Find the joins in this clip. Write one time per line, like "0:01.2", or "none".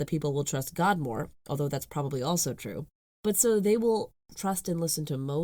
none